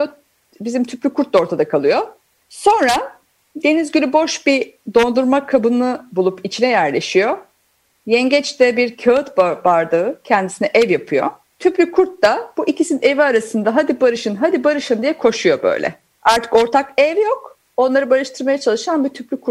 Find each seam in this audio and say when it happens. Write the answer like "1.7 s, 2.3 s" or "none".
none